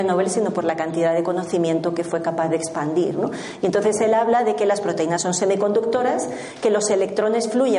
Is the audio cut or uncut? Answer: uncut